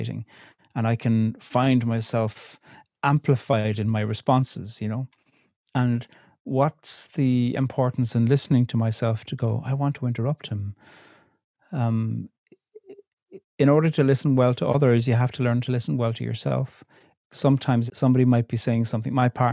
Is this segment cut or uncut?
cut